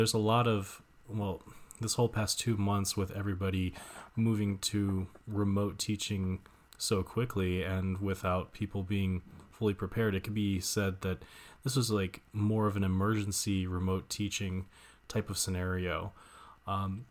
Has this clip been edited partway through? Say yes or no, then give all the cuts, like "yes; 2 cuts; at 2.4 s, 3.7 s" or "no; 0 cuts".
no; 0 cuts